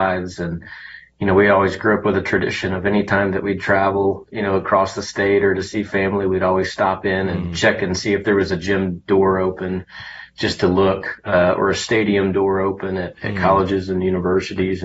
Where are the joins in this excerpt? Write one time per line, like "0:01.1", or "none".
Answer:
none